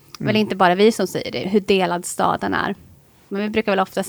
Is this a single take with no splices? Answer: no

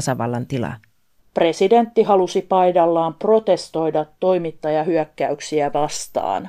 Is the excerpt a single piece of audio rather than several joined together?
no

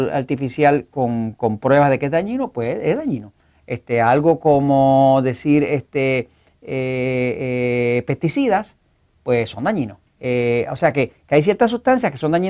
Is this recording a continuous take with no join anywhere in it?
no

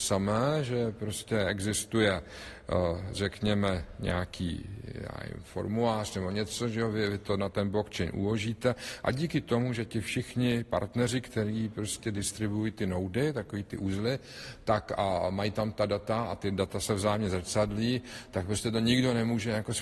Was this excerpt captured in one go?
yes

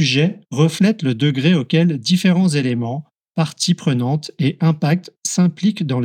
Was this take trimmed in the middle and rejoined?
no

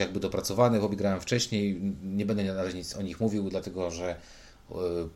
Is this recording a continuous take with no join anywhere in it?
yes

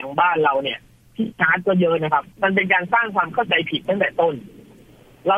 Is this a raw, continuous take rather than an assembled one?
no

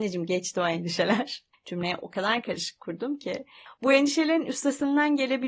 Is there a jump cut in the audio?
yes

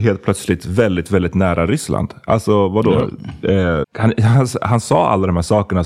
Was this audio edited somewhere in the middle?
yes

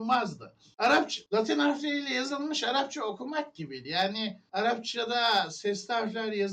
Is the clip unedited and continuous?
yes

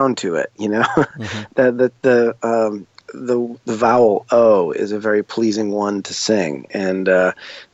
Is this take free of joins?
yes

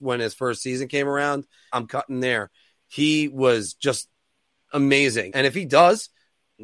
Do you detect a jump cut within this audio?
yes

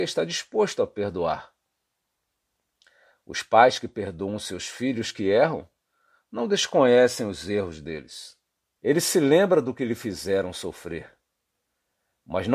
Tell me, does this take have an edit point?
yes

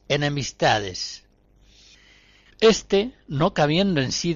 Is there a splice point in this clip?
yes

